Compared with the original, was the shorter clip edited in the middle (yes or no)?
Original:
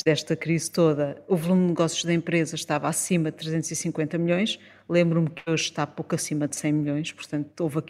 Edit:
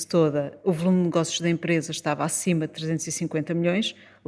no